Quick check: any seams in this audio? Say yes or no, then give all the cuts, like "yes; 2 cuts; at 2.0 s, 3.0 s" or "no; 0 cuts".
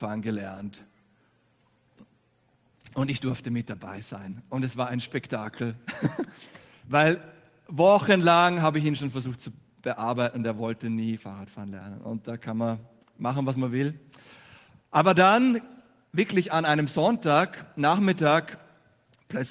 no; 0 cuts